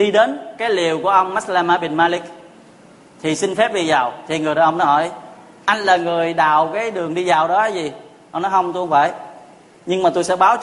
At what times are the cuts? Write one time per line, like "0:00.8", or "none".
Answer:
none

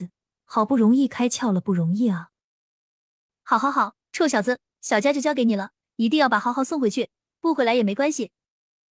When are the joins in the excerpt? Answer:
none

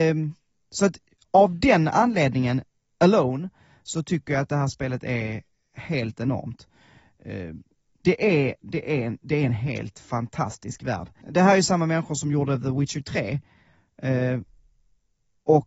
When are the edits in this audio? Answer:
0:11.2

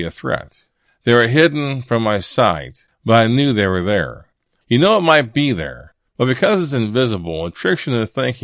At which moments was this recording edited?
0:04.6

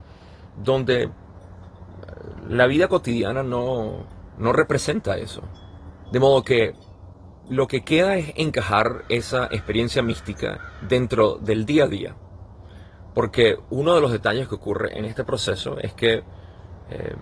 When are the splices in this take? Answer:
0:06.1

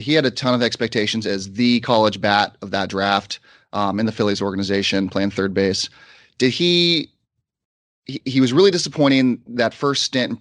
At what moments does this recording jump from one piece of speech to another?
none

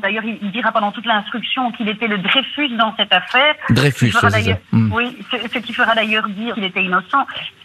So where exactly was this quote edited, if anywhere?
0:06.5

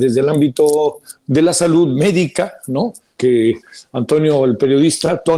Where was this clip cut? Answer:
0:03.2

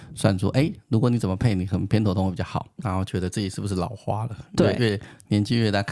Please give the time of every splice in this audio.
0:02.8
0:04.8

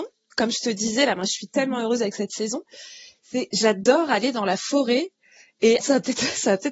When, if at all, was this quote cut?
0:05.8

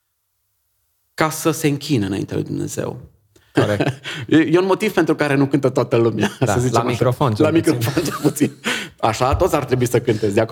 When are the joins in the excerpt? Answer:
0:03.5

